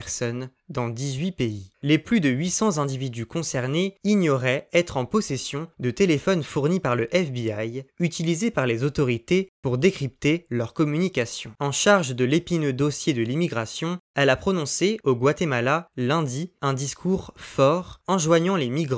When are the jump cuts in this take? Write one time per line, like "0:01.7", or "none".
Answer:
0:11.6